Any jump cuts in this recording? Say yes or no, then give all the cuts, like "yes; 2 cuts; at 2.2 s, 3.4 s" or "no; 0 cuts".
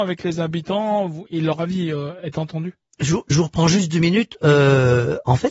yes; 1 cut; at 1.3 s